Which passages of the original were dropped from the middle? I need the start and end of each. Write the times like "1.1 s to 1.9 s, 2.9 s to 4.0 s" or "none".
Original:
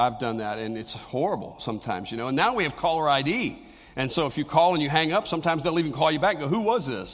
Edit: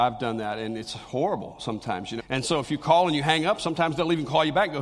2.2 s to 3.9 s